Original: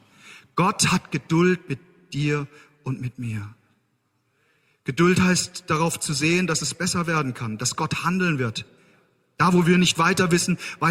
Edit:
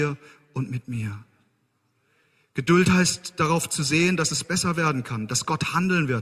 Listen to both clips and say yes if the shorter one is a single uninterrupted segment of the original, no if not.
yes